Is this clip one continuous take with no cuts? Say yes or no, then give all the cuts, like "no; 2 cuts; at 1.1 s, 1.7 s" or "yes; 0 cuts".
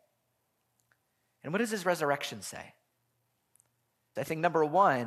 no; 1 cut; at 4.2 s